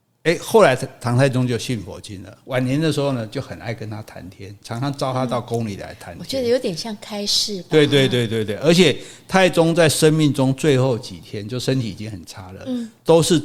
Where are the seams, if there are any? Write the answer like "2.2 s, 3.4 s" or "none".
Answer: none